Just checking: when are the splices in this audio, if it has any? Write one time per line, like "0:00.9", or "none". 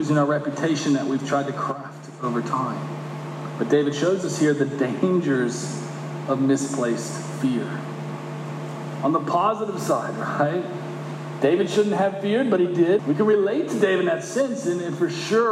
0:13.0